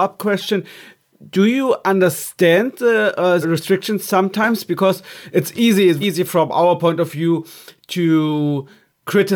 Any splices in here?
yes; 2 cuts; at 3.4 s, 6.0 s

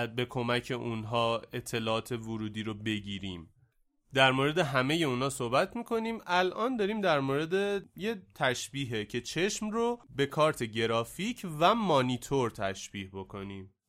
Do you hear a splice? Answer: no; 0 cuts

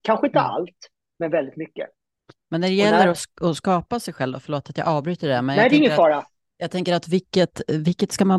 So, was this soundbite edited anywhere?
no; 0 cuts

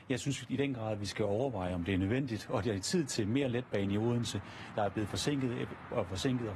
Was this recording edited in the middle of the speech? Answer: yes; 1 cut; at 4.7 s

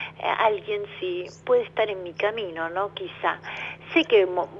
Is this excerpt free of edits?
yes; 0 cuts

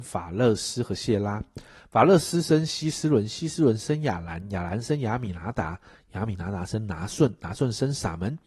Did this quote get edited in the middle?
no; 0 cuts

